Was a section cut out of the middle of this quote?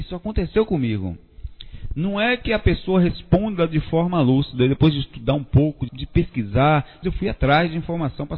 yes; 2 cuts; at 5.9 s, 7.0 s

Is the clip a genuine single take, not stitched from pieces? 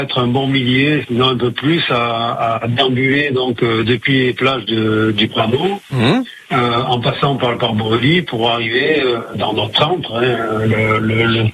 yes; 0 cuts

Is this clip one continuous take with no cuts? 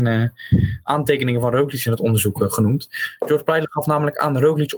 yes; 0 cuts

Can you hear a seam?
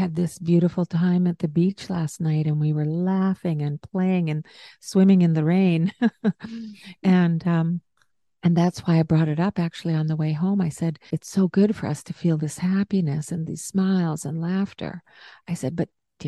yes; 1 cut; at 11.1 s

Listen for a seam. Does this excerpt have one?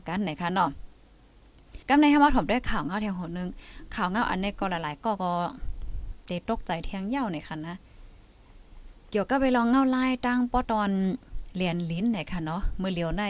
yes; 2 cuts; at 1.8 s, 10.6 s

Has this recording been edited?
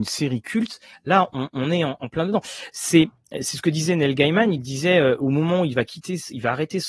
no; 0 cuts

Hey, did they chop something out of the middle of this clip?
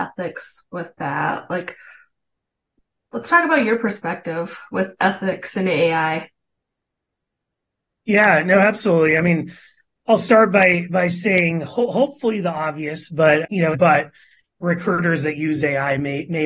yes; 1 cut; at 13.7 s

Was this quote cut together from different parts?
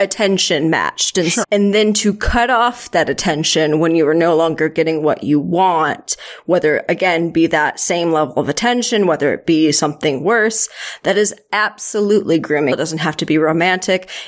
yes; 2 cuts; at 1.4 s, 12.7 s

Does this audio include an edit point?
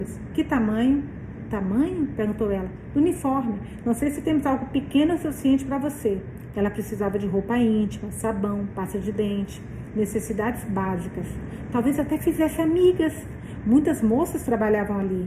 yes; 1 cut; at 6.5 s

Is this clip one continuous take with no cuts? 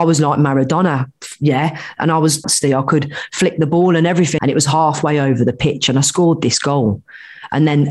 no; 2 cuts; at 2.4 s, 4.4 s

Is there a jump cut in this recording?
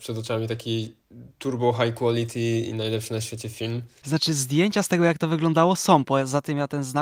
yes; 1 cut; at 4.0 s

